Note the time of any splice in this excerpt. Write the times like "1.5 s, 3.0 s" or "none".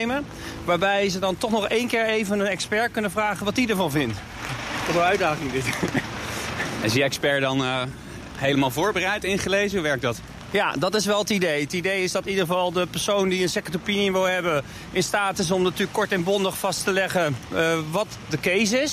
none